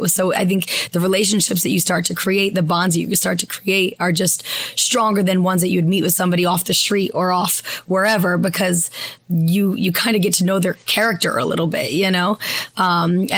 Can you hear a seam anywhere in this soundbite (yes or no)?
no